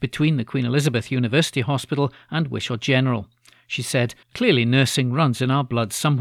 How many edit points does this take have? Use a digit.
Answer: 1